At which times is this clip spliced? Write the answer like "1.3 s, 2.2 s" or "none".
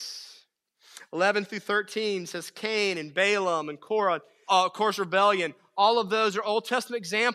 4.5 s